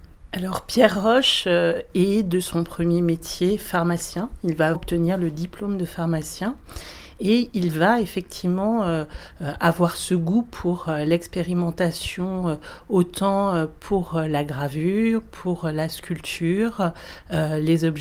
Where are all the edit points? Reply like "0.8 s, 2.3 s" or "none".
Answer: 4.7 s